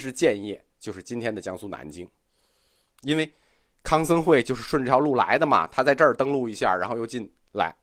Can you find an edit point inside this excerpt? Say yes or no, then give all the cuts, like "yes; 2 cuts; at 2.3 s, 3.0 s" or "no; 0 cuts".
no; 0 cuts